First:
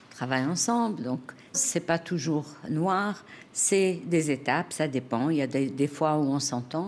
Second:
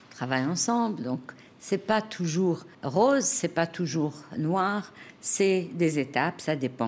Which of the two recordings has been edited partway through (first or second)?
first